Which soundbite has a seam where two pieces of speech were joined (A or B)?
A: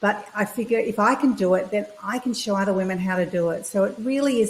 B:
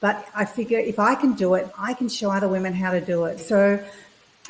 B